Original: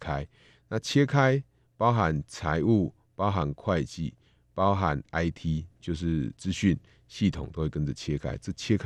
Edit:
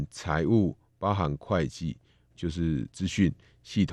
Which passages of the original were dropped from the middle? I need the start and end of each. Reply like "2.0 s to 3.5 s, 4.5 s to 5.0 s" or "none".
4.5 s to 5.8 s